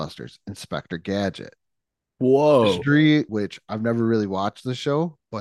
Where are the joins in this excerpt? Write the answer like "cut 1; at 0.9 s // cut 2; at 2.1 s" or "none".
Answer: cut 1; at 3.3 s